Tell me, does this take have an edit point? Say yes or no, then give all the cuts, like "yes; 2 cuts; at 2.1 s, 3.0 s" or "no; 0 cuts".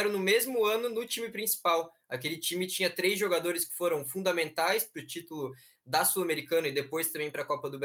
no; 0 cuts